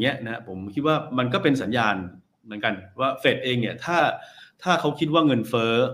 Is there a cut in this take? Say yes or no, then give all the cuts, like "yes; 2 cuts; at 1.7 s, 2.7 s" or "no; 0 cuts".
no; 0 cuts